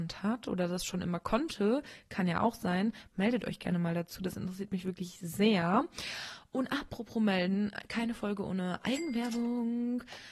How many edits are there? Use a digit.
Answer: 0